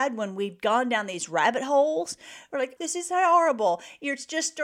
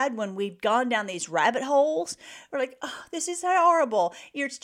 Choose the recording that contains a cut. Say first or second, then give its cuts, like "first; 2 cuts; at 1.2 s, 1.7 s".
first; 1 cut; at 2.8 s